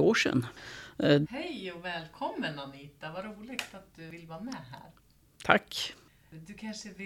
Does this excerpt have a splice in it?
yes; 1 cut; at 1.2 s

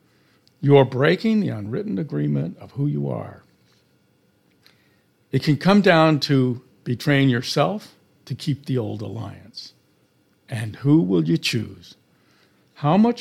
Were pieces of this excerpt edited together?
no; 0 cuts

